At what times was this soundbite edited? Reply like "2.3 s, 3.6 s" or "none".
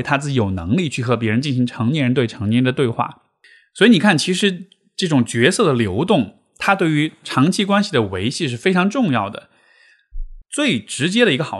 10.4 s